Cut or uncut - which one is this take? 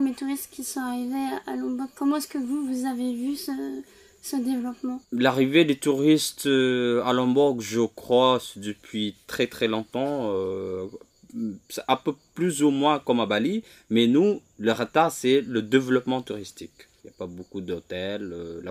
cut